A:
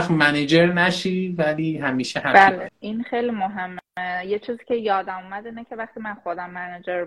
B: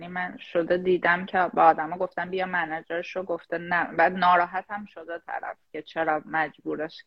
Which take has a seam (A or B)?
A